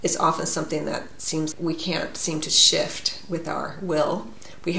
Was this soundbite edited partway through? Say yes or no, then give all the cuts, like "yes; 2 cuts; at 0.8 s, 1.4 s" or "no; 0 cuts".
yes; 1 cut; at 1.5 s